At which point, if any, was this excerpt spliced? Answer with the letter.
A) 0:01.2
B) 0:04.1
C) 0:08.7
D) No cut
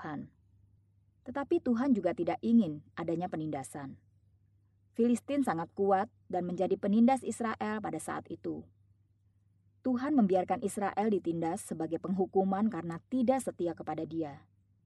D